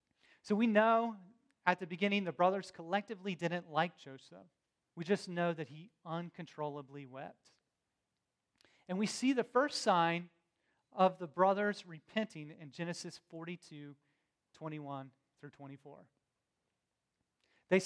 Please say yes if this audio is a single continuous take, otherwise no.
no